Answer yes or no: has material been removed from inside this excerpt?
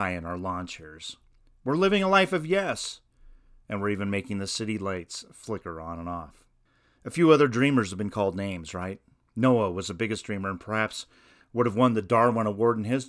no